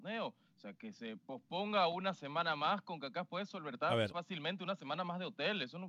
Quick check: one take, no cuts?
no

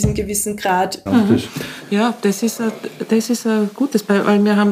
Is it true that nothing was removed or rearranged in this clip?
no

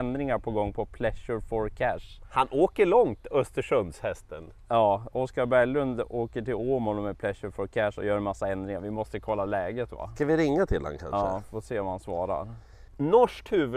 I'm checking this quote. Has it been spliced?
yes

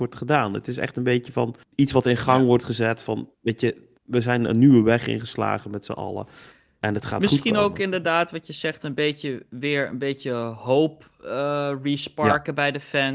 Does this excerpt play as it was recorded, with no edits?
no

